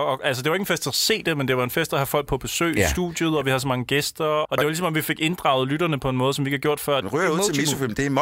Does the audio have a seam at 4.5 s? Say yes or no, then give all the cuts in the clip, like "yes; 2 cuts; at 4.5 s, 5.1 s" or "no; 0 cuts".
yes; 2 cuts; at 4.5 s, 7.0 s